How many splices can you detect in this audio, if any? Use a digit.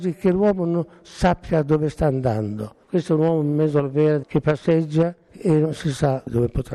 1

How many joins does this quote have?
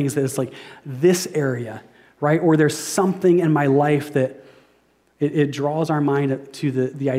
1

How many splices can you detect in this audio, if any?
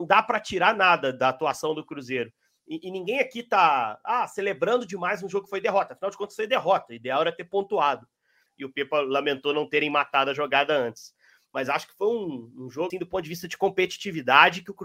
2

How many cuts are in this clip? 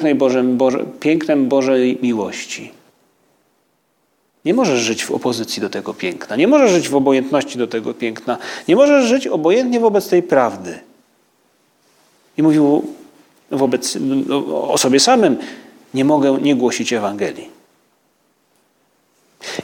0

